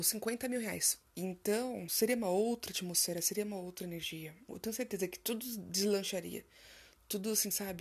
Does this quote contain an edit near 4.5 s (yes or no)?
yes